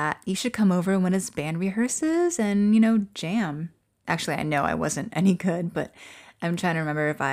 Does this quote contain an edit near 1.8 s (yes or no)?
no